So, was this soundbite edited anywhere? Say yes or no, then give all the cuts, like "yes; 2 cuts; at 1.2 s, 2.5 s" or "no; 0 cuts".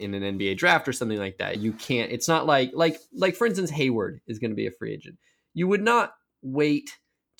yes; 1 cut; at 1.6 s